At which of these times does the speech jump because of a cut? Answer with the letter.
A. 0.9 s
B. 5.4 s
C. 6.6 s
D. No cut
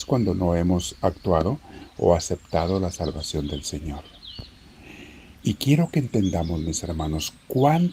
B